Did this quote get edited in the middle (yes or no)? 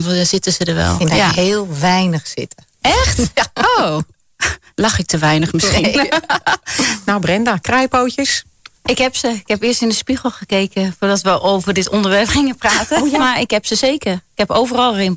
no